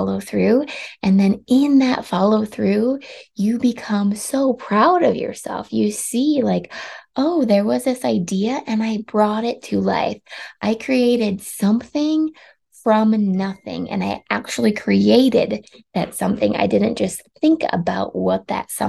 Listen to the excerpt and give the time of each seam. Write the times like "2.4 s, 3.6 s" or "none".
none